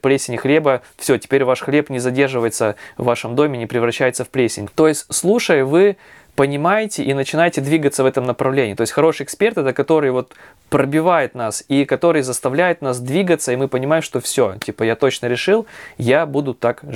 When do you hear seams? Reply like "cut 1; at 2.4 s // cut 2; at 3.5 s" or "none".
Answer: none